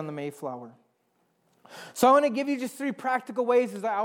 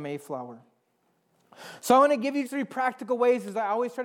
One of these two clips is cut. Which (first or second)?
second